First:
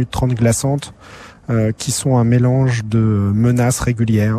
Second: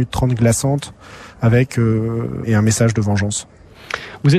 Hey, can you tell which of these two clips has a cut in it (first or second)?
second